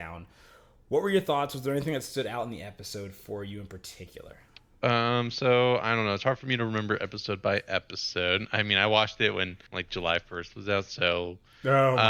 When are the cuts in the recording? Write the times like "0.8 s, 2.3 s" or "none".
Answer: 9.7 s